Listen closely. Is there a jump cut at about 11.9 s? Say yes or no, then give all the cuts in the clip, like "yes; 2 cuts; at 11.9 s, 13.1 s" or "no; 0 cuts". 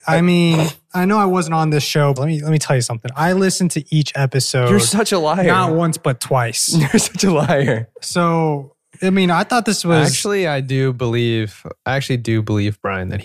no; 1 cut; at 2.2 s